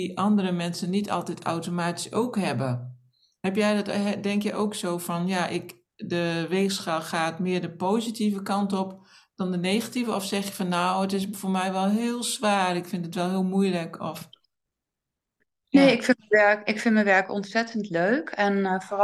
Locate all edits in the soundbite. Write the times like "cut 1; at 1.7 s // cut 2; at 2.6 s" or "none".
none